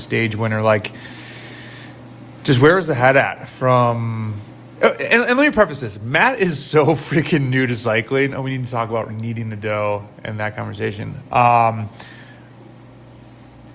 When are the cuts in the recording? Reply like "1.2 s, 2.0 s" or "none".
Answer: none